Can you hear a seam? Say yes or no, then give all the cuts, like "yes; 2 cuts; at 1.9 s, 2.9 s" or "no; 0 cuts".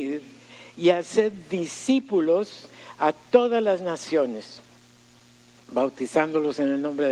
no; 0 cuts